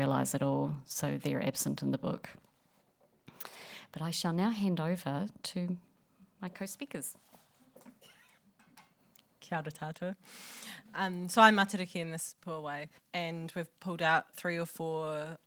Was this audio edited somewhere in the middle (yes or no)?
yes